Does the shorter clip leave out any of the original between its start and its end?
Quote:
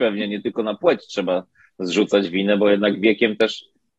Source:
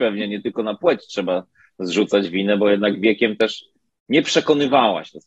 no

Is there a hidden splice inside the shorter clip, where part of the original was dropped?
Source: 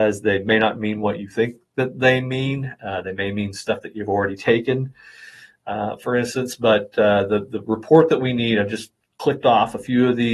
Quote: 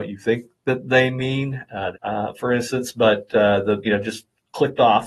yes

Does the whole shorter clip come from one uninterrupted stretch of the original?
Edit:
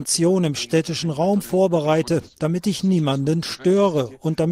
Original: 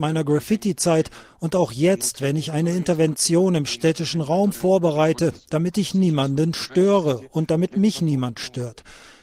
yes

